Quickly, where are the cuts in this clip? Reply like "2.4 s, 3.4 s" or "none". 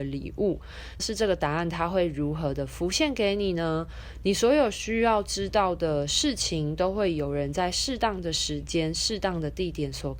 1.0 s